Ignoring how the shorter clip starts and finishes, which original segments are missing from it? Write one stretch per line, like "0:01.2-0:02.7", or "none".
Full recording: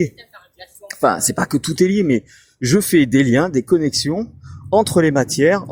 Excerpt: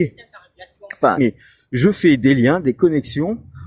0:01.2-0:02.1